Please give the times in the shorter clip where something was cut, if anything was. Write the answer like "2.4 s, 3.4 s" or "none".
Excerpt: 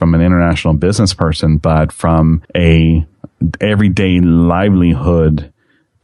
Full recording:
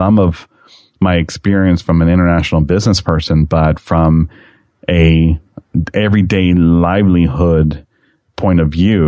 2.4 s